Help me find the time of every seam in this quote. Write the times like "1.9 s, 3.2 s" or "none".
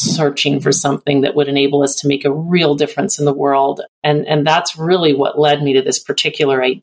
3.9 s